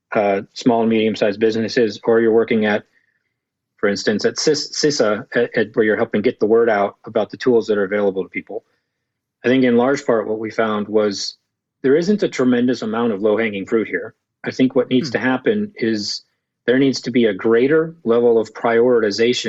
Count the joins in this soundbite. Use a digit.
1